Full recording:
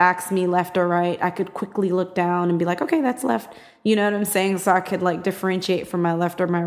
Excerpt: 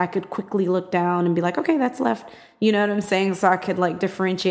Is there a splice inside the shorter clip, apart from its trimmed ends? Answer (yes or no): no